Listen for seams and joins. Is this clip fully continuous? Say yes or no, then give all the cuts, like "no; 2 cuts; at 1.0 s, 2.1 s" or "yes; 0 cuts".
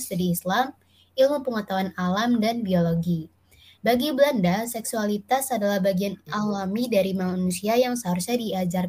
no; 1 cut; at 3.8 s